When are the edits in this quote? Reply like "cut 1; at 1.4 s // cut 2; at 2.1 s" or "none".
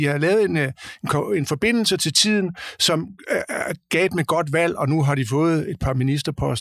none